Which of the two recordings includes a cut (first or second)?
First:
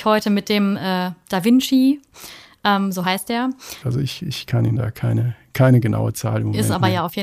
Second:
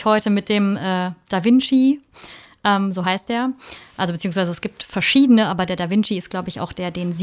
first